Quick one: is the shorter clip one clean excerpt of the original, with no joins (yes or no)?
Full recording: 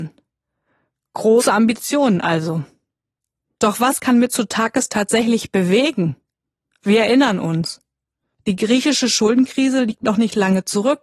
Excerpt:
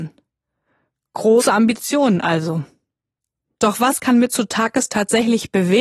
yes